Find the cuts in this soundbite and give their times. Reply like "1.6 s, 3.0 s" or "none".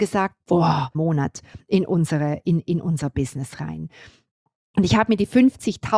0.9 s